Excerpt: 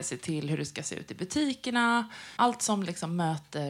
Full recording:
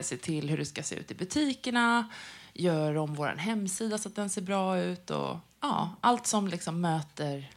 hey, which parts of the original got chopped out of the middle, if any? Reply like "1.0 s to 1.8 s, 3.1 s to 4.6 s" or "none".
2.4 s to 6.0 s